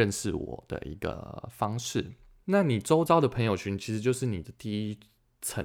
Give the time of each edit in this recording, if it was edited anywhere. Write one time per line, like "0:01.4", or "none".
0:02.4